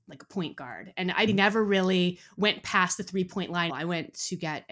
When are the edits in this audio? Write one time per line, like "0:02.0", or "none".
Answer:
0:01.3
0:03.7